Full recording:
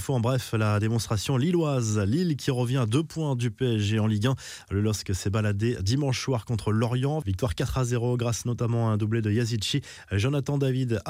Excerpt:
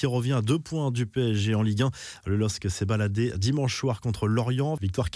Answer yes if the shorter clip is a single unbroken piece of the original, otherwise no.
yes